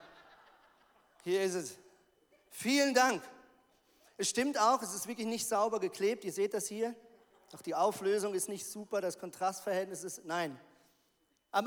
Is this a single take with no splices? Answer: yes; 0 cuts

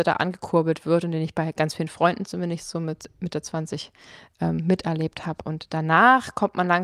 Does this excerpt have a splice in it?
no; 0 cuts

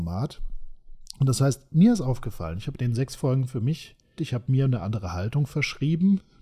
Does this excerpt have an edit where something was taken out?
yes; 1 cut; at 4.2 s

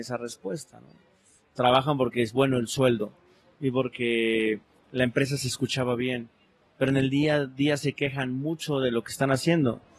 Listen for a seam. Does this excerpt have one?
no; 0 cuts

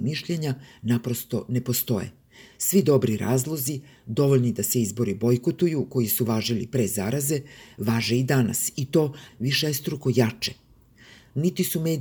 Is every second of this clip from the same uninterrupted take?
no; 1 cut; at 9.3 s

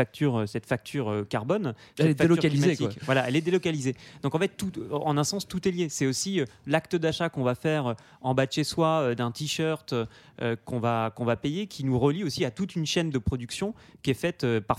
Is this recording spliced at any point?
no; 0 cuts

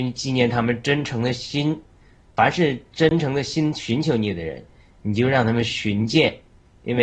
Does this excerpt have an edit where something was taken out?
no; 0 cuts

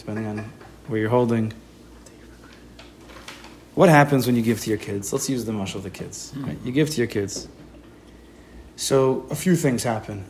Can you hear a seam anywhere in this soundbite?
no; 0 cuts

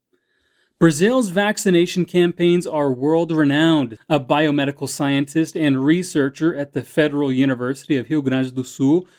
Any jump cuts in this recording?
yes; 1 cut; at 4.0 s

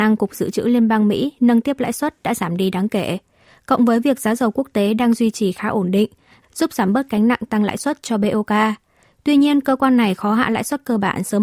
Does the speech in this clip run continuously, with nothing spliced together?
no; 1 cut; at 6.4 s

